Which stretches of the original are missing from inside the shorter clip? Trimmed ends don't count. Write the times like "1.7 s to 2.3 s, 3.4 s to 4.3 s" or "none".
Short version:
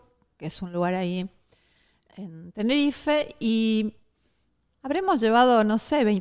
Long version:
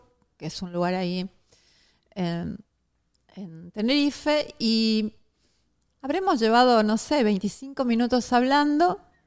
2.1 s to 3.3 s